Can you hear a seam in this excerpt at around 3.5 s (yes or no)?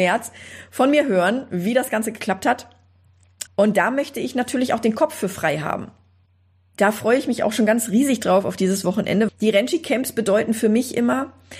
yes